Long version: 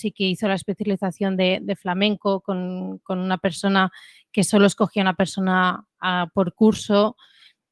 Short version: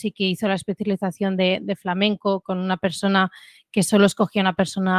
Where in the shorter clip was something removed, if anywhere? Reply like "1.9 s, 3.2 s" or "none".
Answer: 2.4 s